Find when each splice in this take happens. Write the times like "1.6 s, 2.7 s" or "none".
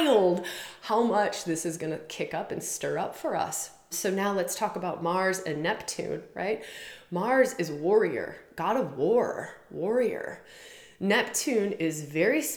3.9 s